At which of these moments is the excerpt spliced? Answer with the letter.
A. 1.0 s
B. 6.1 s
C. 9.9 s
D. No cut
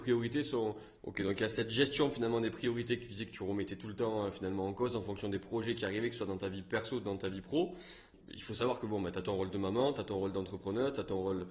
A